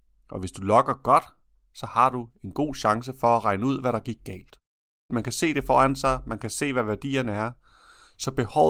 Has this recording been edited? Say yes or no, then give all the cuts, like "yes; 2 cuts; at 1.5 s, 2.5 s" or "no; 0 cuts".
yes; 1 cut; at 5.1 s